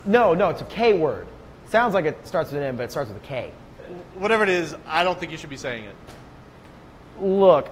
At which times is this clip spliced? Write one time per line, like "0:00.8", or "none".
none

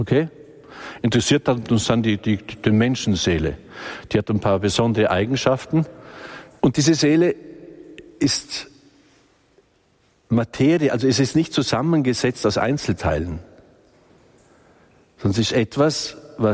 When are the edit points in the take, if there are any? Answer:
0:06.6

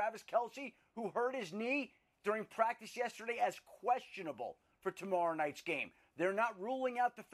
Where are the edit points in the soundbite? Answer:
none

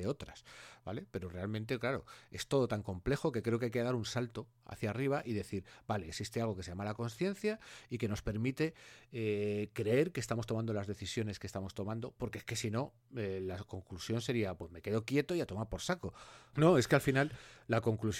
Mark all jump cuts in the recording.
0:16.5

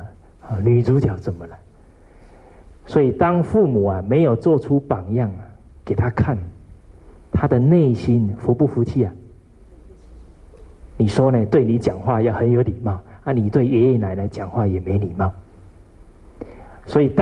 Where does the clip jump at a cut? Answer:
0:10.9

